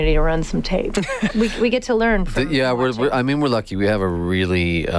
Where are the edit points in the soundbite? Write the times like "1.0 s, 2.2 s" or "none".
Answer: 1.3 s